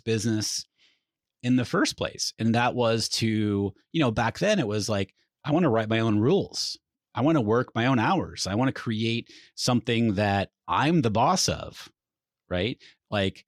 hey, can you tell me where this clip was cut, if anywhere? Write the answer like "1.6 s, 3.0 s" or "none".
none